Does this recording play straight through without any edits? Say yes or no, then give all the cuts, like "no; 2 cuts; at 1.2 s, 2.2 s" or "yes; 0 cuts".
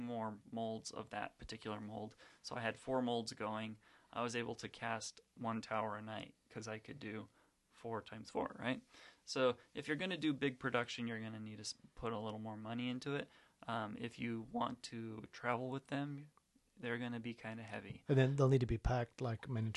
no; 1 cut; at 13.5 s